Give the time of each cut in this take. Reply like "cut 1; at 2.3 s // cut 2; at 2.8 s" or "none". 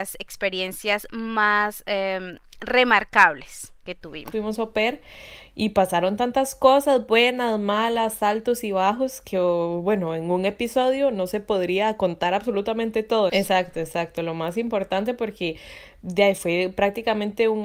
cut 1; at 4.3 s // cut 2; at 13.3 s